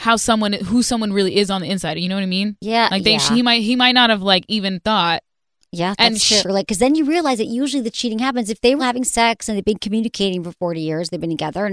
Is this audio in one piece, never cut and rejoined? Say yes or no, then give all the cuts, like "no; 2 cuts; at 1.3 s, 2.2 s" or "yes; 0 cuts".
no; 2 cuts; at 6.4 s, 8.8 s